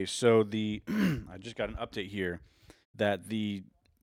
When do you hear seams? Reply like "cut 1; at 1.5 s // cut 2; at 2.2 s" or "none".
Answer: cut 1; at 2.8 s